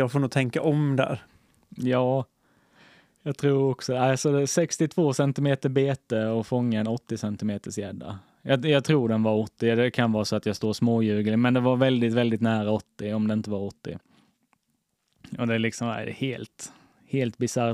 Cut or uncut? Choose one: uncut